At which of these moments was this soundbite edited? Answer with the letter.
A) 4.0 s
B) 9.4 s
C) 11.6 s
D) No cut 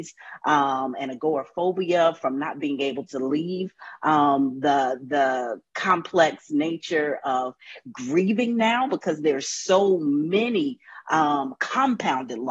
D